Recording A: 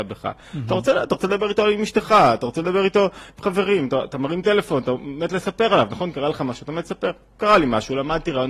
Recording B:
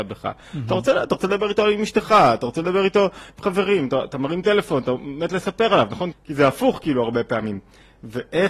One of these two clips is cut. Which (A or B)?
B